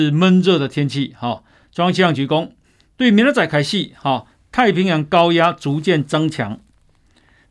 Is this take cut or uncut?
cut